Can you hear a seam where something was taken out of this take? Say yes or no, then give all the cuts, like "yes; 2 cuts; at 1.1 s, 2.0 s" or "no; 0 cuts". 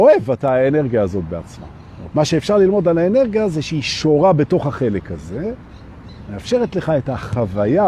yes; 1 cut; at 2.1 s